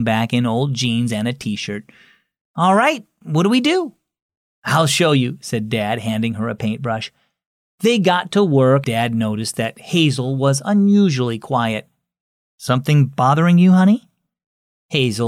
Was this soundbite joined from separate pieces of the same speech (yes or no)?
yes